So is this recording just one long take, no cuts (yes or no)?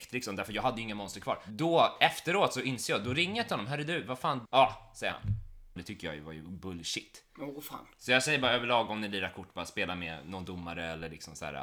no